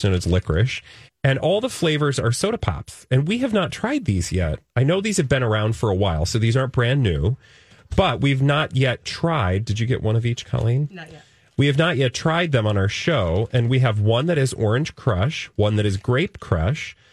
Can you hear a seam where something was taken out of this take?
yes; 1 cut; at 1.1 s

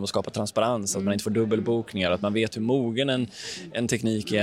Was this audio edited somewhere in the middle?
no; 0 cuts

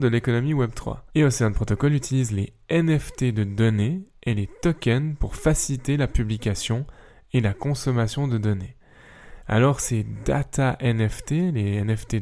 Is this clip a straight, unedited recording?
no; 1 cut; at 1.1 s

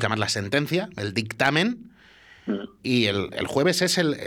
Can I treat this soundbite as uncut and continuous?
yes; 0 cuts

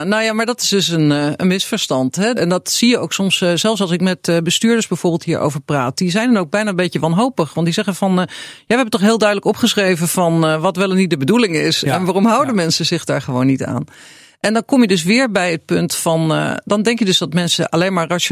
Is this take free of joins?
no; 1 cut; at 2.3 s

